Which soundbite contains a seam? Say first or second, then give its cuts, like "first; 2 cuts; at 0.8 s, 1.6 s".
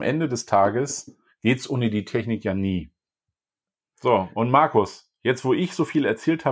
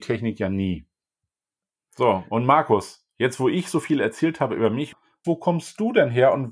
second; 1 cut; at 5.2 s